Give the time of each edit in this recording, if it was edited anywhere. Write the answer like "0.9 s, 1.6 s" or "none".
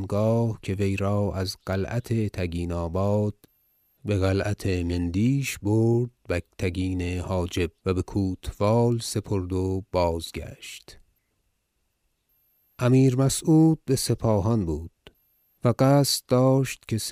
7.8 s